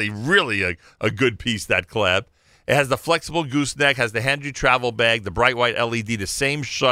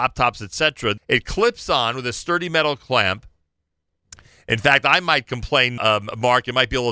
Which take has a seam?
second; 2 cuts; at 1.0 s, 5.8 s

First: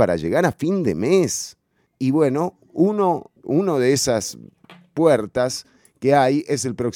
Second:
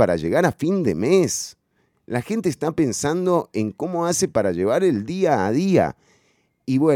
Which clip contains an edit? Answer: first; 2 cuts; at 1.9 s, 3.4 s

